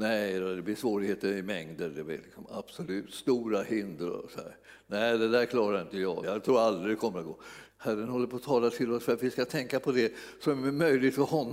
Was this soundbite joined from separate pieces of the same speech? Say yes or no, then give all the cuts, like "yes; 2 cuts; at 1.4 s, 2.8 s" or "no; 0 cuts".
yes; 2 cuts; at 6.2 s, 7.7 s